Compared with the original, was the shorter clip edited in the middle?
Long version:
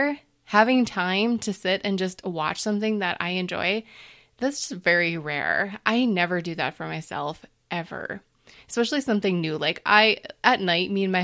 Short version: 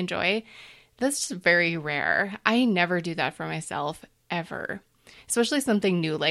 no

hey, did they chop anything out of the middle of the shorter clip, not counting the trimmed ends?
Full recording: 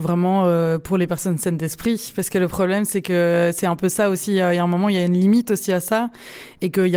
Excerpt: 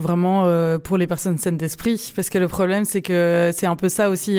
no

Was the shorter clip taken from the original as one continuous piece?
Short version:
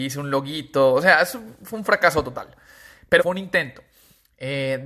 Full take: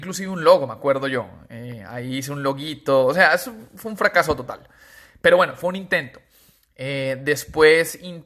no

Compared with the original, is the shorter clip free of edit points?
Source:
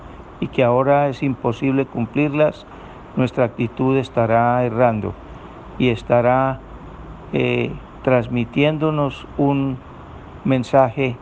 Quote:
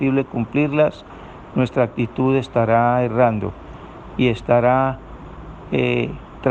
yes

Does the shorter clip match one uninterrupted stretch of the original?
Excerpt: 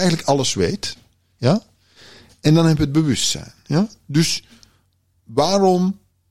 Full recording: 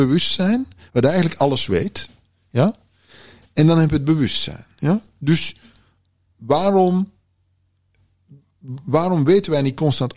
yes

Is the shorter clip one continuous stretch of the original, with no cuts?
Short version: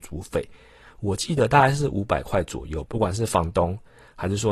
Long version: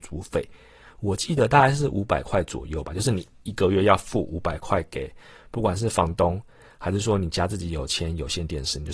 no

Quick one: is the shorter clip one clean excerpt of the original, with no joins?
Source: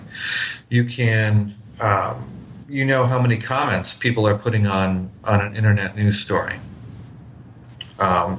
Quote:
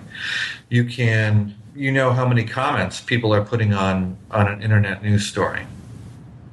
no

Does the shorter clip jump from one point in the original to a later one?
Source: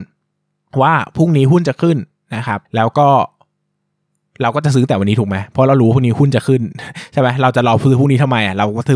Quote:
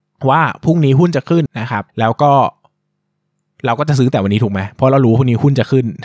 yes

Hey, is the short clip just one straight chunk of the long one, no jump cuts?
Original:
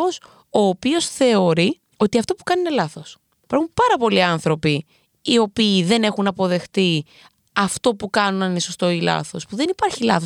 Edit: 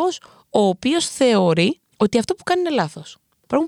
yes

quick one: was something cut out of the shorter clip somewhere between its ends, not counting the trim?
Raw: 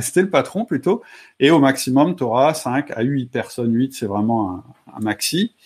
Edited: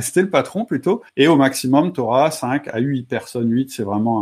yes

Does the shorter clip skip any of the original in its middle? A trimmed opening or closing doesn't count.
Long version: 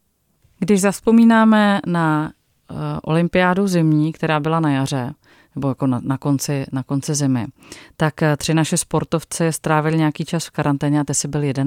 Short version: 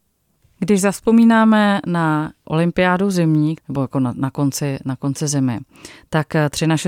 yes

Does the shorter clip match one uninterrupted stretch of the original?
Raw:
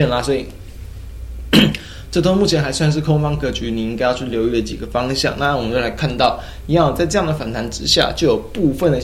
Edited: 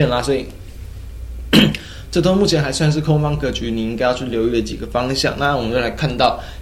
yes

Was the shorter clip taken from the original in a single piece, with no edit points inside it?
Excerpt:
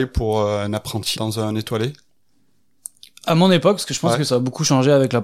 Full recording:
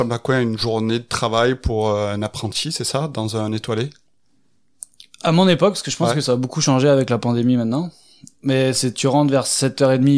no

